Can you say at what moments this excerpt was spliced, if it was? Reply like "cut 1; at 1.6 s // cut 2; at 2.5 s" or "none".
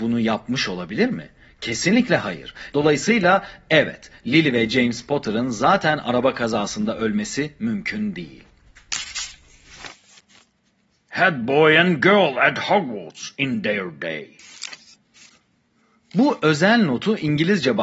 cut 1; at 2.7 s